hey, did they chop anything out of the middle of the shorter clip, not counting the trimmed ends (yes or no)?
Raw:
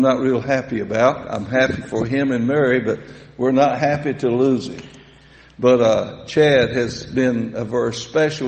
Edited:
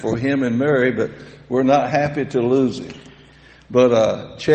no